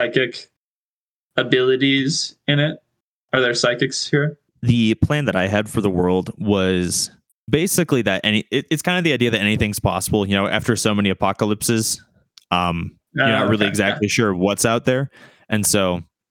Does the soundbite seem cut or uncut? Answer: uncut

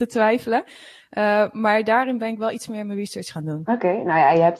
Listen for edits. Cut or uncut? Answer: uncut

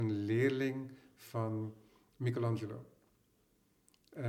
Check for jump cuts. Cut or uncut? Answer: uncut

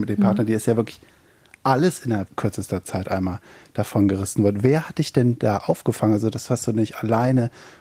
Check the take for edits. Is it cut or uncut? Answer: uncut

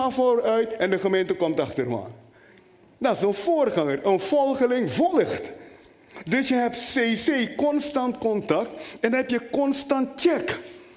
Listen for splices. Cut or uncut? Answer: uncut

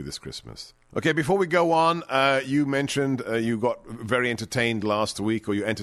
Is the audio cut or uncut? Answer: uncut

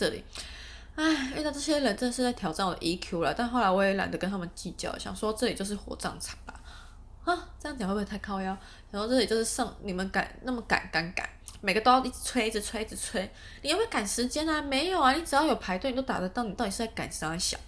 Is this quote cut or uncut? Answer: uncut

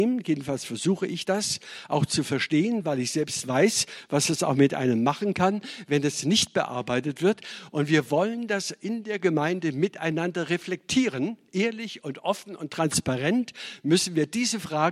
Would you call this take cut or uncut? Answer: uncut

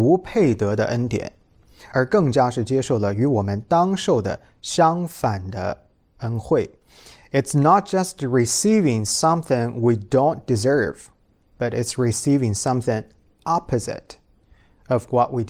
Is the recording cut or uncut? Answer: uncut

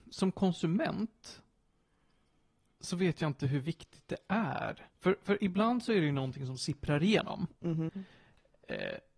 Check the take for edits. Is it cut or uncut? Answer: cut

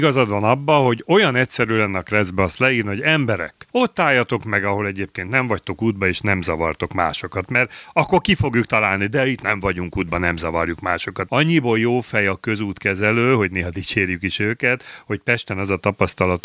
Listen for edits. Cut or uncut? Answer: cut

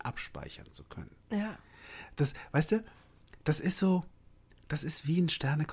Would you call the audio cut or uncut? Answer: uncut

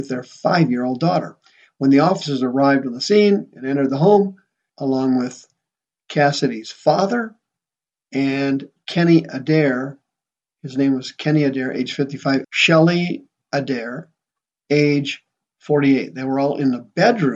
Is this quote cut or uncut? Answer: cut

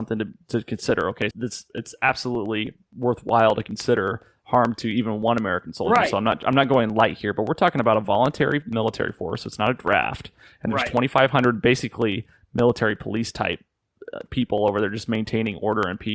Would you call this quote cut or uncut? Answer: cut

